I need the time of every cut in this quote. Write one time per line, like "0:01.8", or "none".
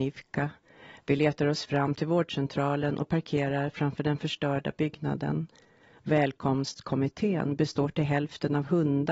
none